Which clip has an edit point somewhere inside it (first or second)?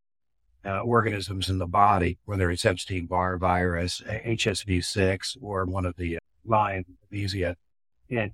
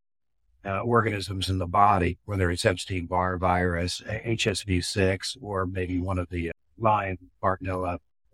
first